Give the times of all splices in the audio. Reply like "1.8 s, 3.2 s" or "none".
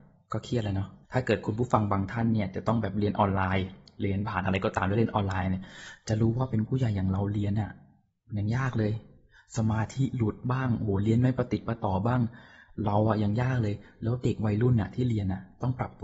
1.0 s